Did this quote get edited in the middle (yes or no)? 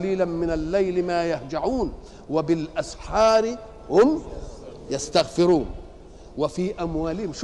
no